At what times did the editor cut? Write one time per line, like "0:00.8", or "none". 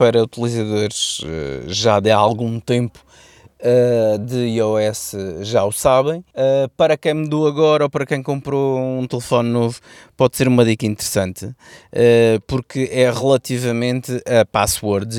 0:06.3